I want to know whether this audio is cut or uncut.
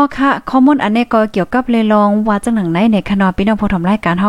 cut